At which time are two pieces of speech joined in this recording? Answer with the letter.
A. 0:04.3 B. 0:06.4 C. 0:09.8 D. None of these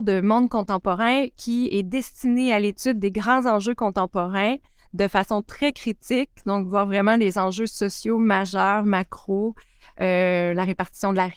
D